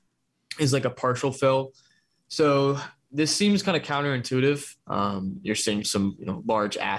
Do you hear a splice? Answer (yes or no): yes